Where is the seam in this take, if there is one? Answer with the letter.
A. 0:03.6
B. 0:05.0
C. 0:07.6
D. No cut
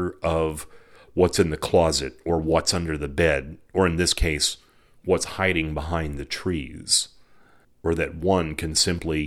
C